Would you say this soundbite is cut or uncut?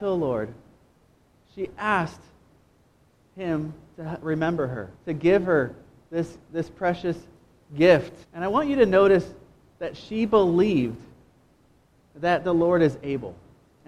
cut